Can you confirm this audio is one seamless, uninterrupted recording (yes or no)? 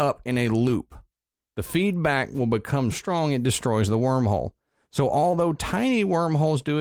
no